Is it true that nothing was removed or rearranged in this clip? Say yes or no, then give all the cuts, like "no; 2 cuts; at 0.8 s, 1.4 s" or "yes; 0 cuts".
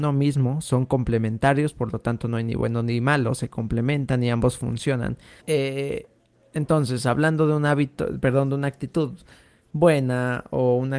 no; 1 cut; at 5.4 s